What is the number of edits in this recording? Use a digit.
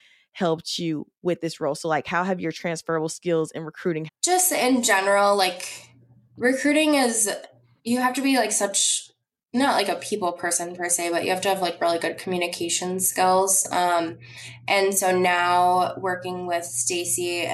1